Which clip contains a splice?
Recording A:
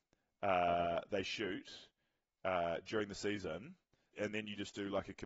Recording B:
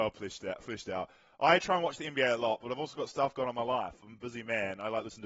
A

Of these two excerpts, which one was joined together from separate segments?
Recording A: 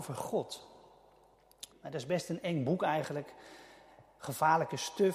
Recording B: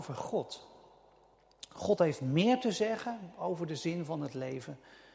A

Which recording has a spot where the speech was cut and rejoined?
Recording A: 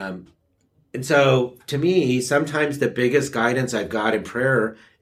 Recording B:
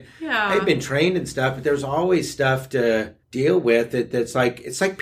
B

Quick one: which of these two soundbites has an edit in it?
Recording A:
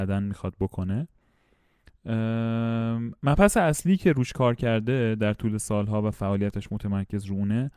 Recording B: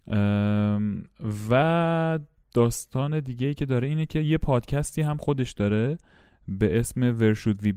A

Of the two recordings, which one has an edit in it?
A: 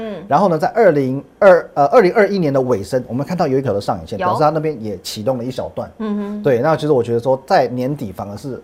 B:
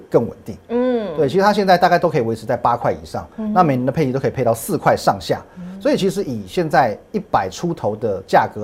A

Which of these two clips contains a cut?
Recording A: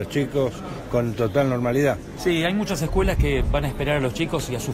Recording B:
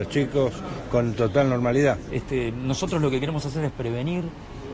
B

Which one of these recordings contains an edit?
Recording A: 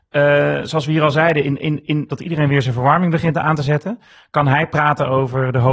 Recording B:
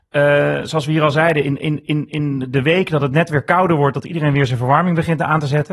A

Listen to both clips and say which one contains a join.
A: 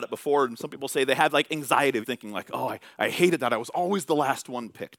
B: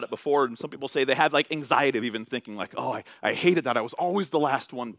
A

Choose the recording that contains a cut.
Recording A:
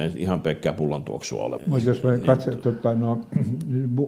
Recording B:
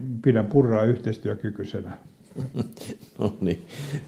A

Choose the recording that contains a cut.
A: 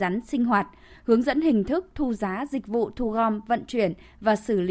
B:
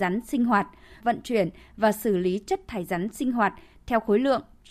B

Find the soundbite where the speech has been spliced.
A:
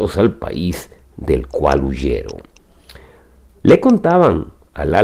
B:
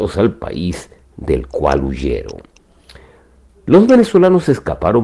A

